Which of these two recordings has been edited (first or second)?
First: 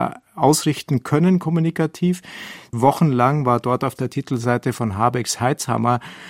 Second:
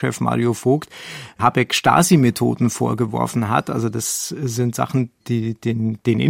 first